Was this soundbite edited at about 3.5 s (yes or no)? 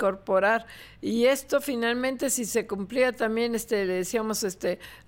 no